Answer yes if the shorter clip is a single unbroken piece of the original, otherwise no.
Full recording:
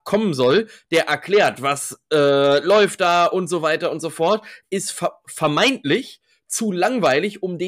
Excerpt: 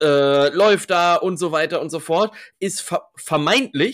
yes